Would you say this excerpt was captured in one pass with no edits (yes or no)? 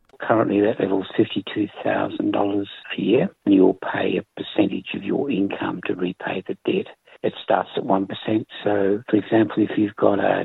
no